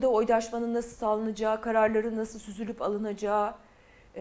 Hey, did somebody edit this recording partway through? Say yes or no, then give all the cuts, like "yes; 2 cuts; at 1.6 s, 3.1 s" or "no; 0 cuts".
no; 0 cuts